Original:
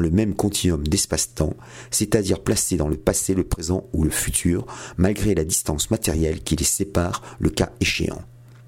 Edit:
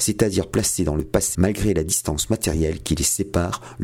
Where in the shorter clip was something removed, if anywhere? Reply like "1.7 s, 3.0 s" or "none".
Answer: 1.3 s